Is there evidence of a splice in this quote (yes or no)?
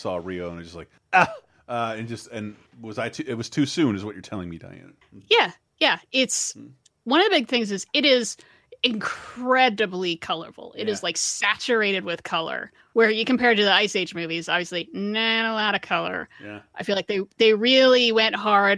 no